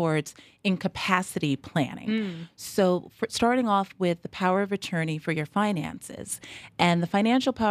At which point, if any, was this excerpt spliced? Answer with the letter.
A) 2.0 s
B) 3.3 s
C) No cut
C